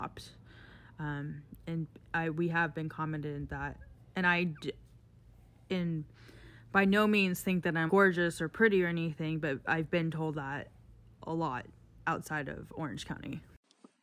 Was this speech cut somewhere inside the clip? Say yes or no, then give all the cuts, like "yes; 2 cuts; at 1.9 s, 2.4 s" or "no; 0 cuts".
yes; 1 cut; at 7.9 s